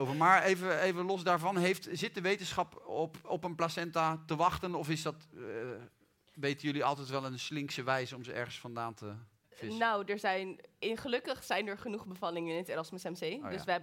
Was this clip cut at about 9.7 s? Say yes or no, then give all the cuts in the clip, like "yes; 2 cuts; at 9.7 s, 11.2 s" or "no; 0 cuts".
no; 0 cuts